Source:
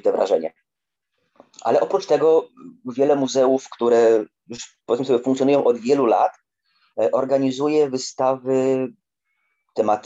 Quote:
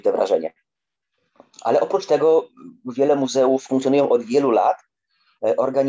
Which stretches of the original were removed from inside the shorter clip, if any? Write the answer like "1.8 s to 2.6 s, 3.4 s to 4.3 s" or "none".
3.7 s to 5.2 s